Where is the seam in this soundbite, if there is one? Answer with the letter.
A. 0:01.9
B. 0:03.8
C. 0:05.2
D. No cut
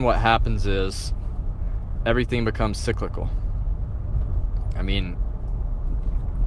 D